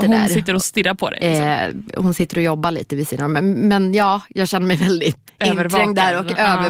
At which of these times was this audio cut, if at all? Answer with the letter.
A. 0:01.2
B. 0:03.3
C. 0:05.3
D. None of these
C